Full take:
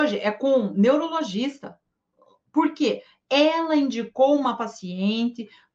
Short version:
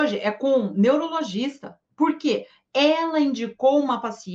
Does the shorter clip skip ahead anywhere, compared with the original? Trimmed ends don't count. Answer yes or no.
yes